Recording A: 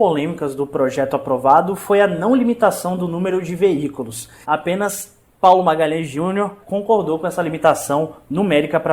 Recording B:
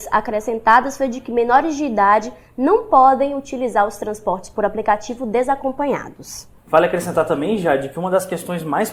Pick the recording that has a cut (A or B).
A